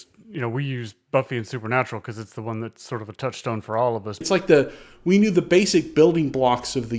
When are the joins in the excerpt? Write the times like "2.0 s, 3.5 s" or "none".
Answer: 4.2 s